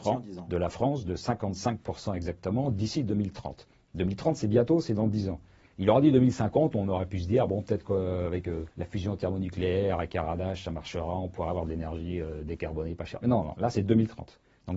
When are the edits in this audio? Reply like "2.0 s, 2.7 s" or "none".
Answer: 5.6 s, 8.7 s